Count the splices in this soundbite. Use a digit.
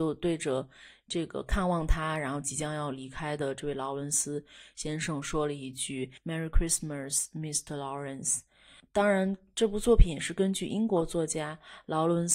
0